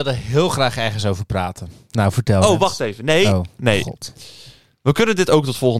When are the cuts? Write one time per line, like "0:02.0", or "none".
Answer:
none